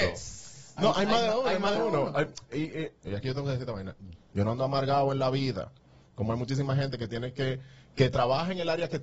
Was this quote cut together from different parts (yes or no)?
yes